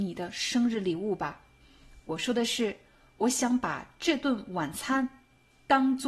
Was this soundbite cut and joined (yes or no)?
no